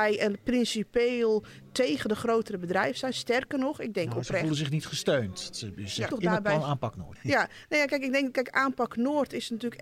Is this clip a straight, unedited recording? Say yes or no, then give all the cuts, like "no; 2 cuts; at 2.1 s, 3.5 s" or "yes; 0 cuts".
no; 1 cut; at 6.1 s